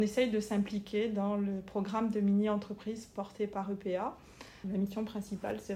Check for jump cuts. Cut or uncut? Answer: cut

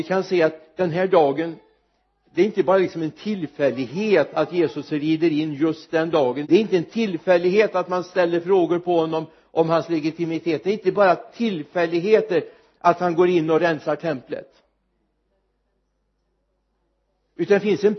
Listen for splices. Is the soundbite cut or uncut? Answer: cut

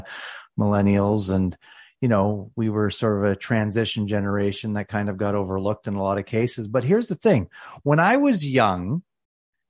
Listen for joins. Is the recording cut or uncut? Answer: uncut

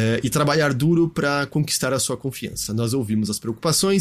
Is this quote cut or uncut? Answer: uncut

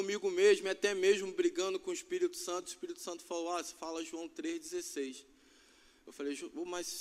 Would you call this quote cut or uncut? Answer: uncut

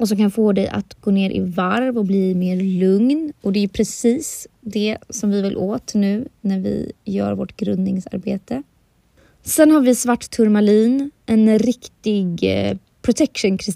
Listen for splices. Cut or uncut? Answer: uncut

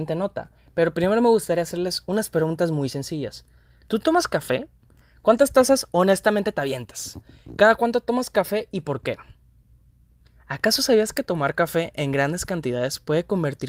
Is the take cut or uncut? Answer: uncut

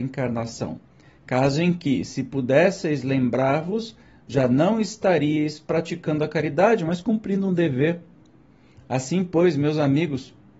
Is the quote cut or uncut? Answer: uncut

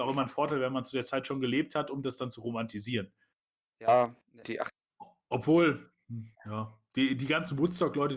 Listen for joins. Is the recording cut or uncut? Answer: cut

